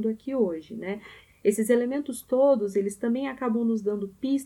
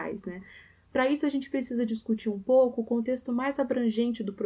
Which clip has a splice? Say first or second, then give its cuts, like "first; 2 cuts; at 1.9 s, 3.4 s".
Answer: first; 1 cut; at 1.3 s